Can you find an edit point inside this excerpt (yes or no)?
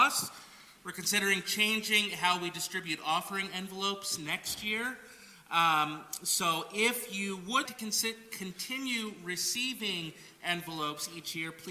yes